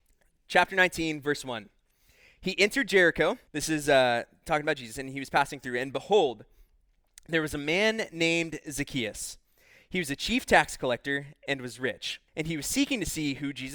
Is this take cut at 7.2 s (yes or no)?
no